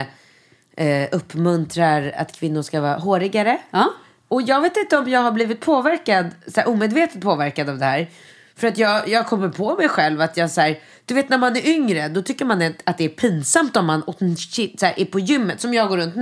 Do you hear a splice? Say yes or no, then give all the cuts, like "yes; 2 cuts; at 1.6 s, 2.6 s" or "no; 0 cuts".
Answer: no; 0 cuts